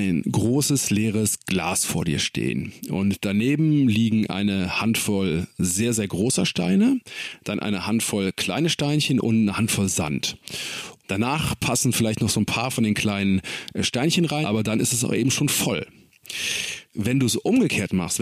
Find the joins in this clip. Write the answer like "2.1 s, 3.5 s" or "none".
11.0 s, 14.4 s, 16.9 s